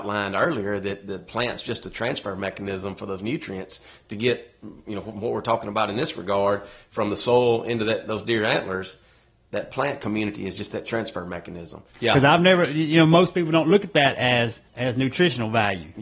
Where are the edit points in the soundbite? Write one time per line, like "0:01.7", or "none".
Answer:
0:11.9
0:14.7